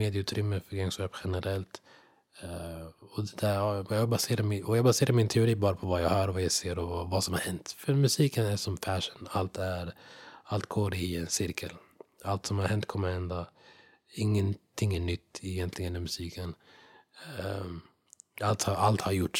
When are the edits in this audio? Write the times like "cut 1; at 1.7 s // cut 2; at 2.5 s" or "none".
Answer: none

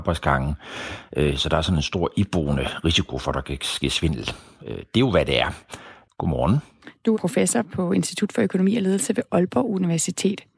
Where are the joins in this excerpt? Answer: cut 1; at 6.0 s // cut 2; at 7.1 s

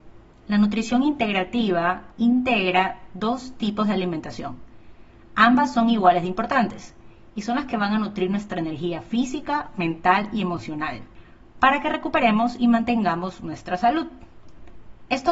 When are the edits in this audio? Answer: cut 1; at 2.1 s

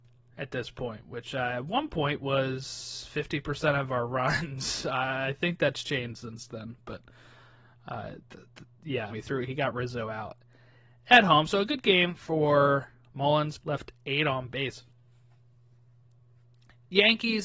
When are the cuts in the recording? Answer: cut 1; at 9.1 s // cut 2; at 13.6 s

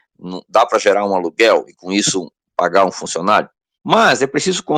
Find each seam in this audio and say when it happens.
cut 1; at 3.8 s

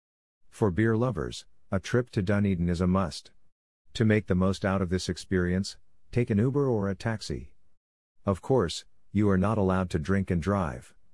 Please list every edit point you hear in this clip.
cut 1; at 3.9 s

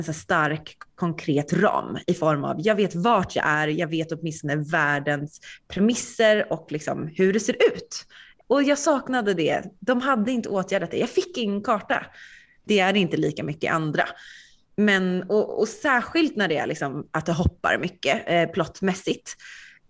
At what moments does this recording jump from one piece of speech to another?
cut 1; at 12.7 s

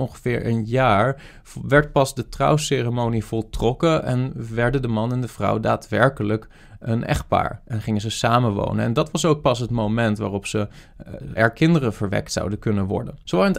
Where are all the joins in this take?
cut 1; at 11.4 s

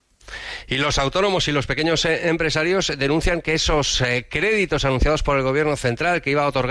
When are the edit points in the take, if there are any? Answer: none

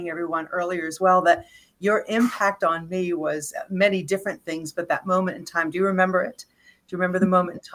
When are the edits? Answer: none

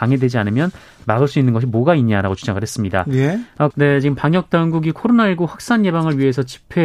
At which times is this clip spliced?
cut 1; at 3.7 s

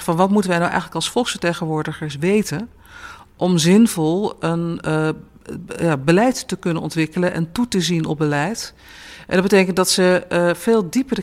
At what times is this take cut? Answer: none

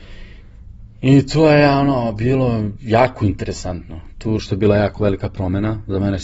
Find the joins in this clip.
cut 1; at 4.4 s

